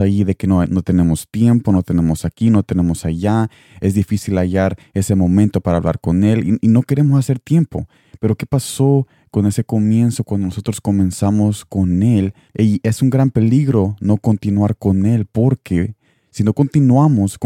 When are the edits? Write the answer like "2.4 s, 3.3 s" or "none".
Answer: 12.5 s